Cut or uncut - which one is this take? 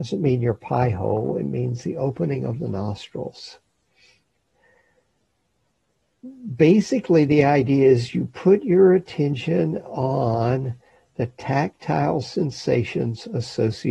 uncut